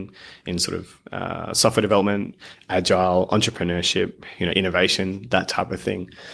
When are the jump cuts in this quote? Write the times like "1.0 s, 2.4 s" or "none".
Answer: none